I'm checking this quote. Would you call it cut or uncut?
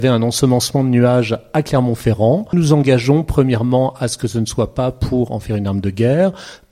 cut